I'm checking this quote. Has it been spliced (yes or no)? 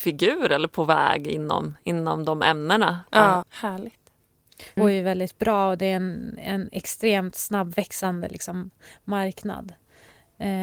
yes